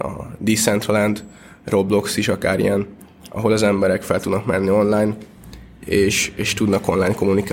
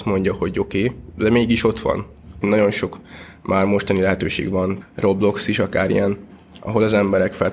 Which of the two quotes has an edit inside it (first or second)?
second